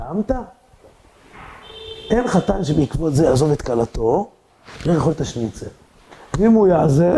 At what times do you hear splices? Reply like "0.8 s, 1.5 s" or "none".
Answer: none